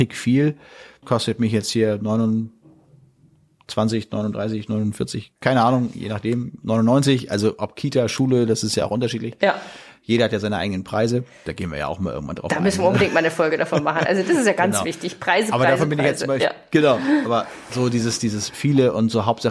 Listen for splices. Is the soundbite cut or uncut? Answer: cut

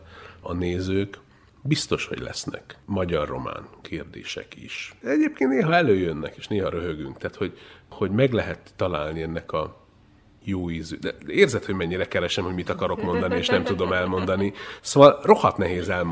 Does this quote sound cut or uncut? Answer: uncut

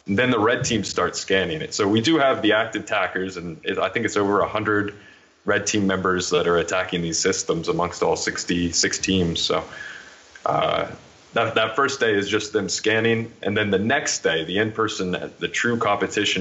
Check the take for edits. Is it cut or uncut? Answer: uncut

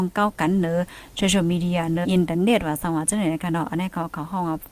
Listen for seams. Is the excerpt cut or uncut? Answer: cut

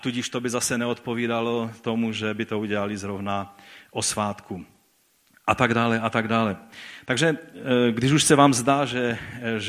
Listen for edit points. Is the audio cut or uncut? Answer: uncut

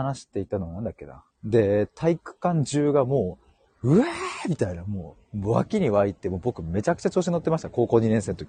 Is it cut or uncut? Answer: cut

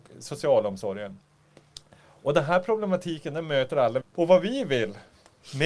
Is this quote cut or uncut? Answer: cut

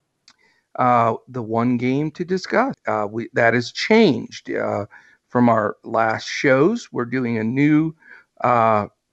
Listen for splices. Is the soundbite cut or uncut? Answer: cut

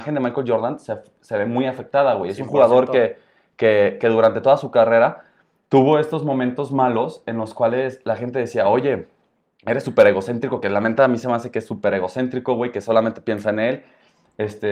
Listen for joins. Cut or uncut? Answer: uncut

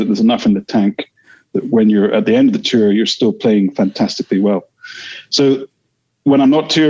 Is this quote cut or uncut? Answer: uncut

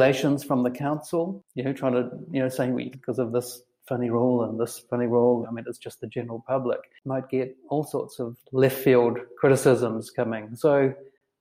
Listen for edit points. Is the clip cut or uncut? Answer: cut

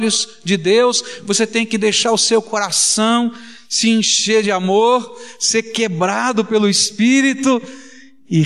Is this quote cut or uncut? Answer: uncut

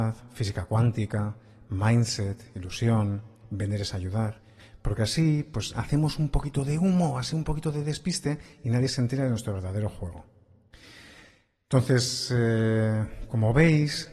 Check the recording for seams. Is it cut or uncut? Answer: uncut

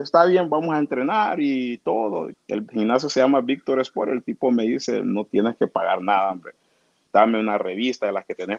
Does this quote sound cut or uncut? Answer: cut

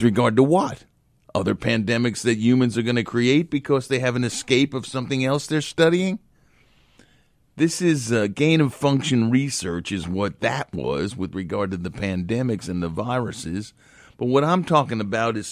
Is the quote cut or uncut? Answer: uncut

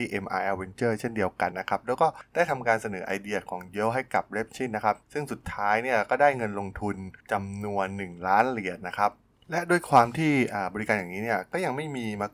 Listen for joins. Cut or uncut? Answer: cut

